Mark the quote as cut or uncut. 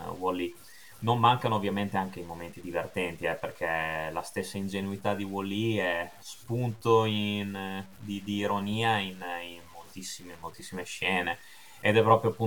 cut